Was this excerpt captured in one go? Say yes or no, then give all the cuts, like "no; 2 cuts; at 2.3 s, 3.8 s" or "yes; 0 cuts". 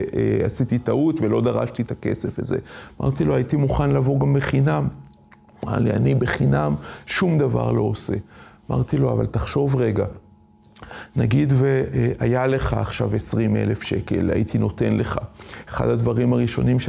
yes; 0 cuts